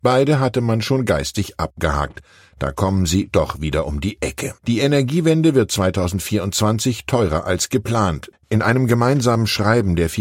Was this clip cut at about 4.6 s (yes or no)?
yes